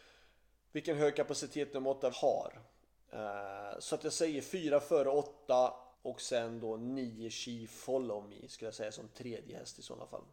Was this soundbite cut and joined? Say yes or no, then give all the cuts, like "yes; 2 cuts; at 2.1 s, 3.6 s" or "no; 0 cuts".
yes; 2 cuts; at 2.1 s, 5.9 s